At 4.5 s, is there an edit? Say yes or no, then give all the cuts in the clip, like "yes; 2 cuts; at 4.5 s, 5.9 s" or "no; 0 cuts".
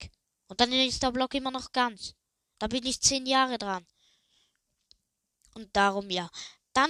no; 0 cuts